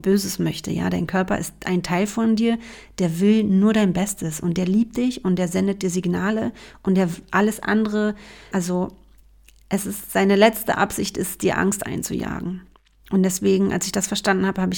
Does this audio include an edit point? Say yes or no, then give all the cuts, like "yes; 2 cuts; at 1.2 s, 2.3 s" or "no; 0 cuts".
yes; 1 cut; at 8.5 s